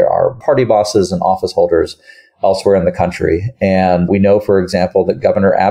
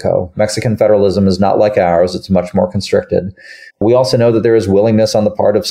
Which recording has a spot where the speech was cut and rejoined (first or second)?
second